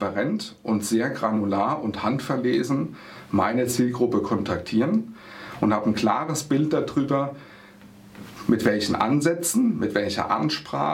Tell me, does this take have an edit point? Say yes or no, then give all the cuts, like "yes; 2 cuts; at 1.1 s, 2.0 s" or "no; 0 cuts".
no; 0 cuts